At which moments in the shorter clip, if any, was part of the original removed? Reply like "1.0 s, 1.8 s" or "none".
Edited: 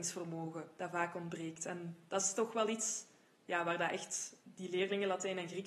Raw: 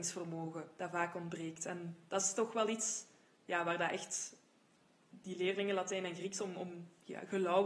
4.4 s